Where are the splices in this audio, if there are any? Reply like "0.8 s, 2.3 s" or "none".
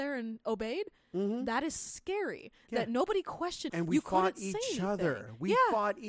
3.7 s